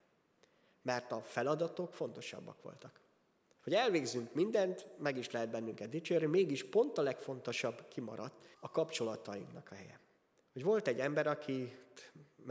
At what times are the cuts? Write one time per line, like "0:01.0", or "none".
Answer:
0:03.6
0:08.5
0:10.4